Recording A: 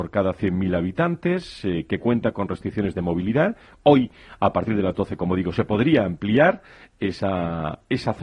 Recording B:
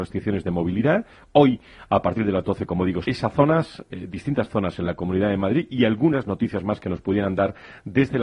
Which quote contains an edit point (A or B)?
B